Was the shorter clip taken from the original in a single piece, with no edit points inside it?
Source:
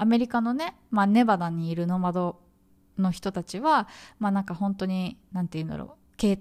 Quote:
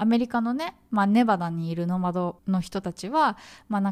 no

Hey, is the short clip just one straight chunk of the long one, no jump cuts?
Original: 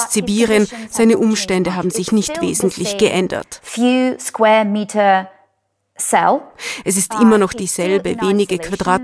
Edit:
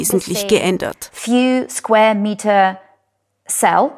yes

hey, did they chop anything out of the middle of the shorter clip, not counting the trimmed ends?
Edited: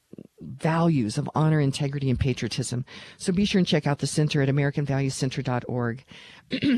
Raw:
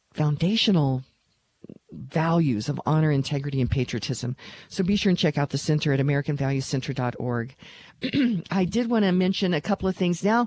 no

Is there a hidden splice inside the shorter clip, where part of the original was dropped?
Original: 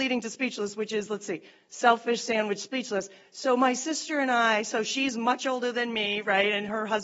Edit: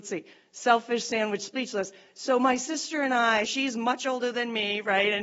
yes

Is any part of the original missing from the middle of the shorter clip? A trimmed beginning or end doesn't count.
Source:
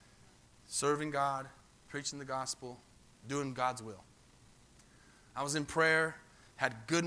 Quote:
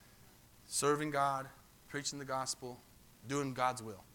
no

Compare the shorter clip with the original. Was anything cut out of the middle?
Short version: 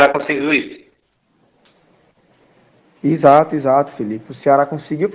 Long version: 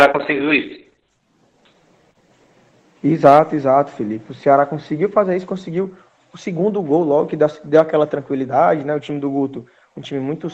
no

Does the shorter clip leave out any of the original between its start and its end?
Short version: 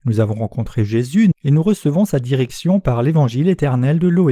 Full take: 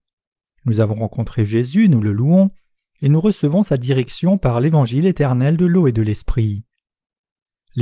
yes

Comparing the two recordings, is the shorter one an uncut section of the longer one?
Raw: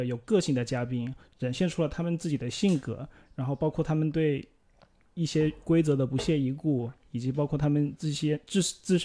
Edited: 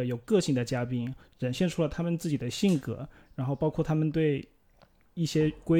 yes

